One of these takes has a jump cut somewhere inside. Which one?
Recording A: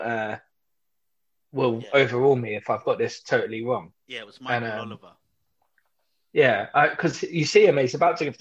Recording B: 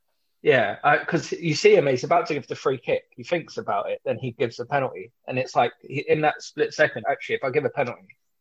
B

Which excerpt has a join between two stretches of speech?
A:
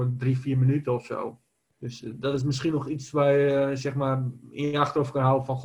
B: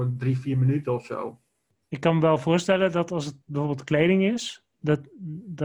A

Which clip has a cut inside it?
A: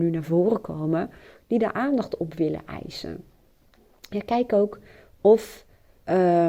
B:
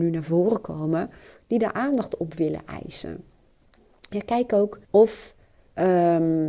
B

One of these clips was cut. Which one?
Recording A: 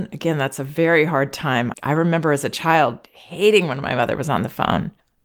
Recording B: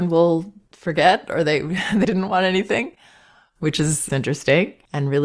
B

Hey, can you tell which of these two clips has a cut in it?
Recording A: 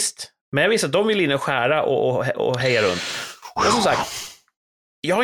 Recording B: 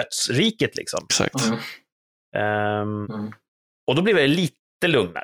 B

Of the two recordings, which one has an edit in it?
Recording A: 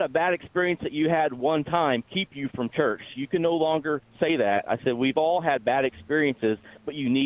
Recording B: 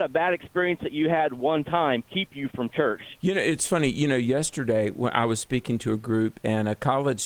B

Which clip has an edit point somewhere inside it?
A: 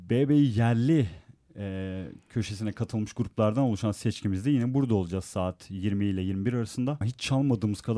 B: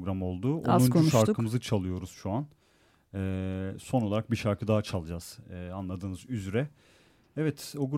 A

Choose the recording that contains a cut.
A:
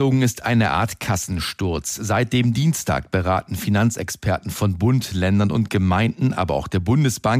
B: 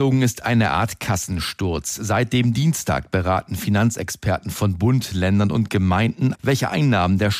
B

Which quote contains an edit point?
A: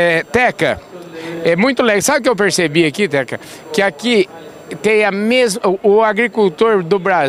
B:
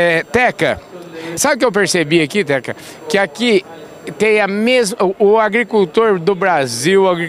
B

